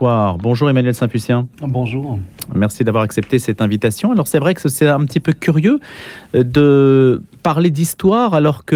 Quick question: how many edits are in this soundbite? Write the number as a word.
one